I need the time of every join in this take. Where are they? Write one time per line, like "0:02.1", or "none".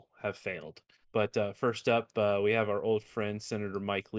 0:01.0